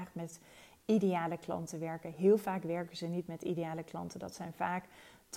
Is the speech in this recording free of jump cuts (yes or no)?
yes